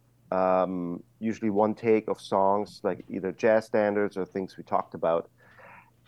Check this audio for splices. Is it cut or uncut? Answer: uncut